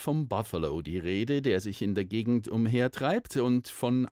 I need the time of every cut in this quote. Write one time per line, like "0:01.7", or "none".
none